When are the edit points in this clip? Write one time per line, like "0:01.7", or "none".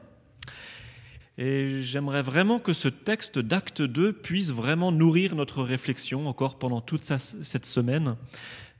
0:01.2

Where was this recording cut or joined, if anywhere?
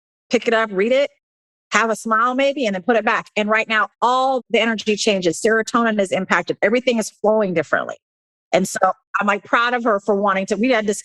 0:03.9

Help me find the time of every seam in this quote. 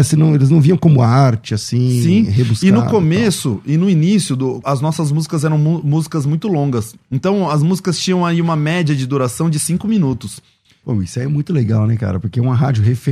0:04.6
0:10.8

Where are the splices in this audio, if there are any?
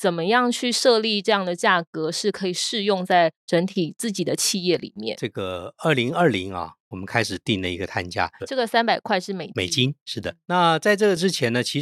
0:08.4

